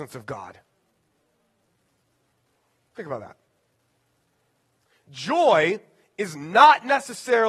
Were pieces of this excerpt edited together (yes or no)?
no